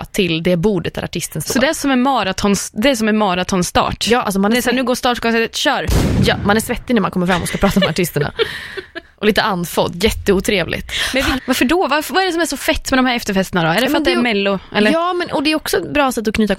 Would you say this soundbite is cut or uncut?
cut